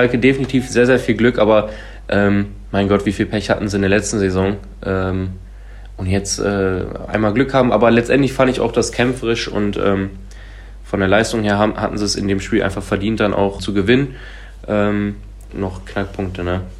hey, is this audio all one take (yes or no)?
no